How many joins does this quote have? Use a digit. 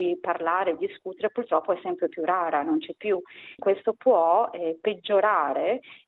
1